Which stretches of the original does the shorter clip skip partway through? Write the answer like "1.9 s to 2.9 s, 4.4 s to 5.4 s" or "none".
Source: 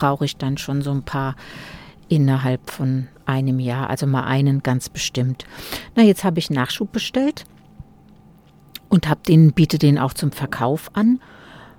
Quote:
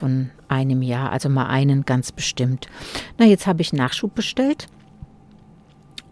none